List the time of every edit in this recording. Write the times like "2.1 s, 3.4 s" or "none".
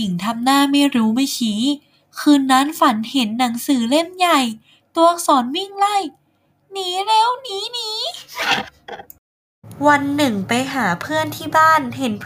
none